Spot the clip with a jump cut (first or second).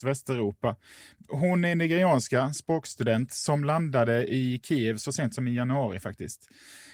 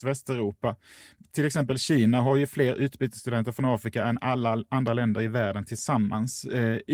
first